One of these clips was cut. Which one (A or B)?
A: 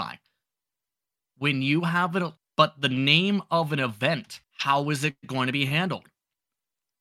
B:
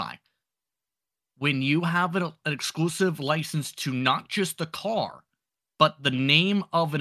A